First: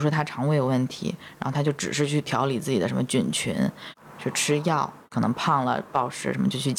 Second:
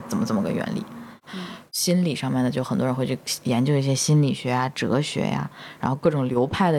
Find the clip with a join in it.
second; 1 cut; at 1.3 s

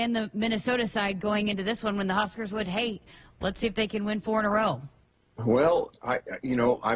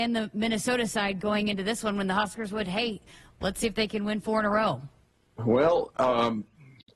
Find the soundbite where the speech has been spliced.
first; 1 cut; at 5.9 s

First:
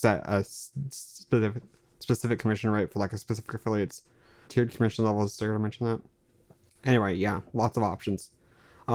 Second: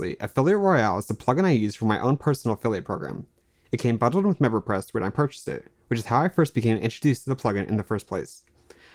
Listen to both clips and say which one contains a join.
first; 1 cut; at 4.5 s

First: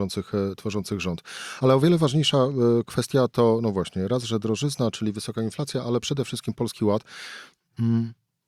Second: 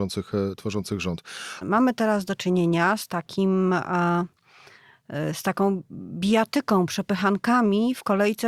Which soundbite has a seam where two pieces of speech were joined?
second; 1 cut; at 1.6 s

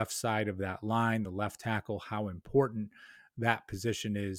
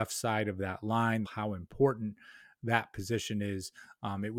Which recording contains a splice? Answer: second; 1 cut; at 1.2 s

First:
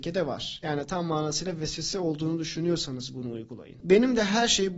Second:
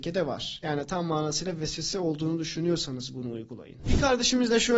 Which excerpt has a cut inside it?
first; 1 cut; at 3.8 s

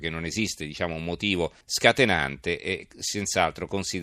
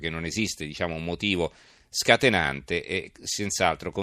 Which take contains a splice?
first; 1 cut; at 1.6 s

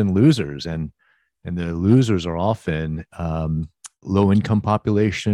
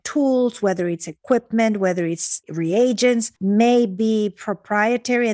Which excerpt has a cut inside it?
second; 1 cut; at 3.4 s

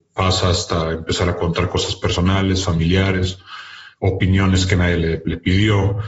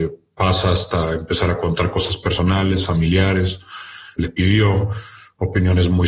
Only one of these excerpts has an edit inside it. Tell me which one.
second; 1 cut; at 4.2 s

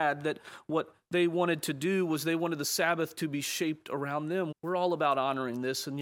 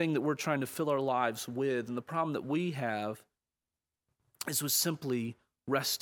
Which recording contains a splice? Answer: first; 1 cut; at 4.5 s

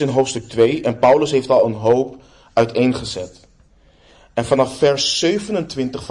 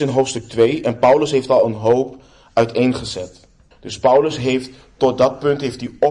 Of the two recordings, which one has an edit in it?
second; 1 cut; at 3.7 s

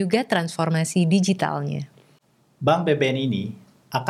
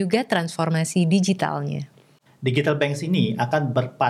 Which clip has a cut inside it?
second; 1 cut; at 2.3 s

